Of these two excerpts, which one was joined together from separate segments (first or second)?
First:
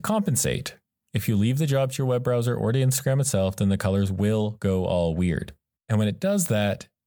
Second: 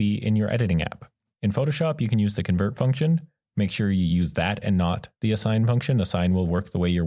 first